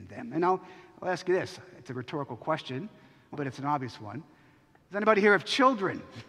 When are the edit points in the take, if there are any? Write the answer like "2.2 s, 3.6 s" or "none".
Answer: 3.3 s